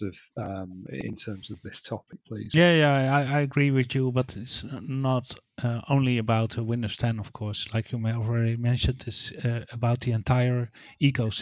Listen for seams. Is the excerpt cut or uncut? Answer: uncut